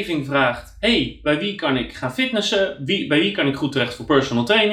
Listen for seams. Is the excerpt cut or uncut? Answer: uncut